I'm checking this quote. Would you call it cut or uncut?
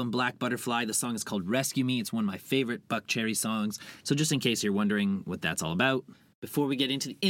cut